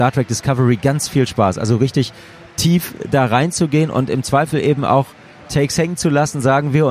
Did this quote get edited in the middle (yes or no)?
no